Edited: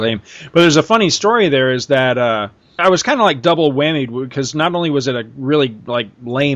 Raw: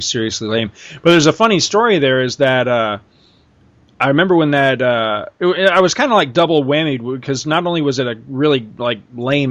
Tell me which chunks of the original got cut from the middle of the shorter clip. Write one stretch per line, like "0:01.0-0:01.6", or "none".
0:03.3-0:05.7